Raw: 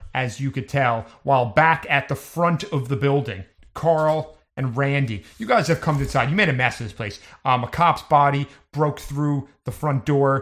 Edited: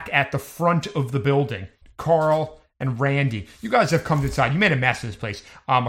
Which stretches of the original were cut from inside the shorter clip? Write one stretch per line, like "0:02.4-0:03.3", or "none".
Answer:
none